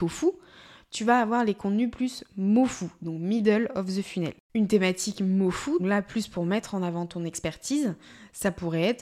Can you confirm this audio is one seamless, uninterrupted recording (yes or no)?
no